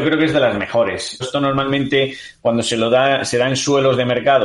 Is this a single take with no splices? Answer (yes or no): no